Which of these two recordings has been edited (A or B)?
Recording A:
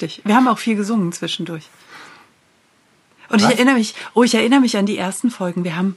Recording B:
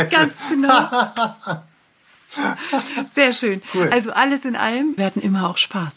B